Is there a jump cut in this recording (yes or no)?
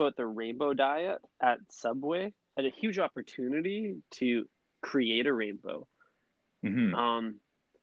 yes